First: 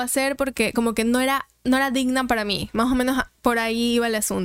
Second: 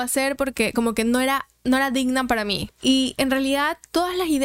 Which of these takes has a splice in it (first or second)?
second